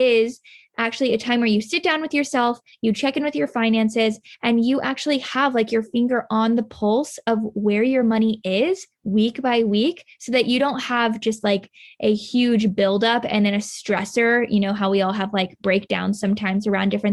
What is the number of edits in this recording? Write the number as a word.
zero